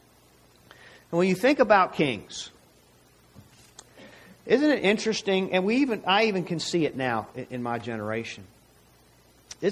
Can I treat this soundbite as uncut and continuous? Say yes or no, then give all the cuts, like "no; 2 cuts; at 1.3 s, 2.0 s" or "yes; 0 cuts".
yes; 0 cuts